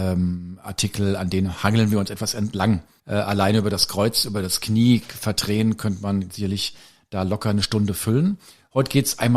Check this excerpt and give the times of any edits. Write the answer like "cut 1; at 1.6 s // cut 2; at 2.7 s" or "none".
cut 1; at 3.0 s